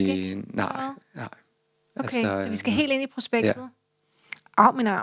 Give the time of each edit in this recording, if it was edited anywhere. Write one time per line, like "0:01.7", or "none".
none